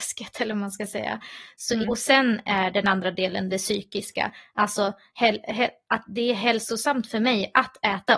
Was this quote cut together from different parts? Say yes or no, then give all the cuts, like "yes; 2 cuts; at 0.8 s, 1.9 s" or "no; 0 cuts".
yes; 1 cut; at 1.8 s